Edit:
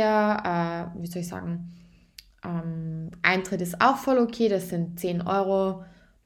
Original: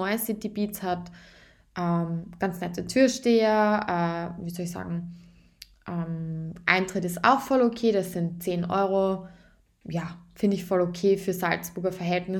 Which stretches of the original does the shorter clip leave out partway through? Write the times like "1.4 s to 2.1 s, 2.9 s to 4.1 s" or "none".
none